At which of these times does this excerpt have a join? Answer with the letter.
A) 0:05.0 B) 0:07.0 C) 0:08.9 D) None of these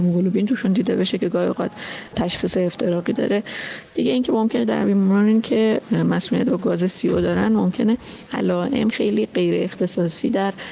C